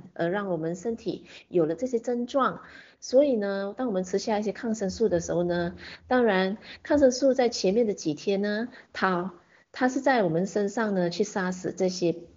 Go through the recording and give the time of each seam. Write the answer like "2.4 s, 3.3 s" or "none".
none